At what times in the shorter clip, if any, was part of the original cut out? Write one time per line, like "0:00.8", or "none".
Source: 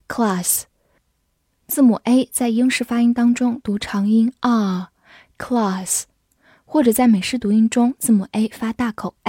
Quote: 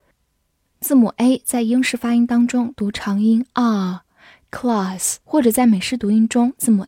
0:05.2